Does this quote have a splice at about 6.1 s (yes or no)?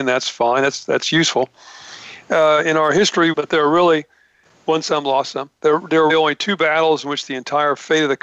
yes